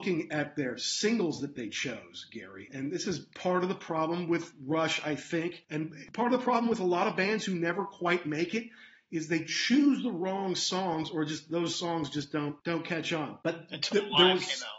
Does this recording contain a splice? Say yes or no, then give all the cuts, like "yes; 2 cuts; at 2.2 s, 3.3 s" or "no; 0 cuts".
yes; 1 cut; at 13.4 s